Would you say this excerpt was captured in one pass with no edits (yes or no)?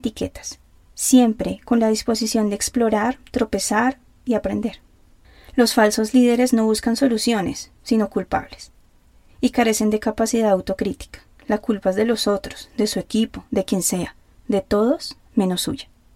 yes